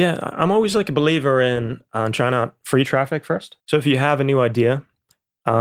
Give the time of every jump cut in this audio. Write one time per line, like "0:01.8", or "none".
0:03.6